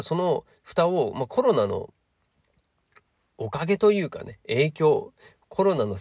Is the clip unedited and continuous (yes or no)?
yes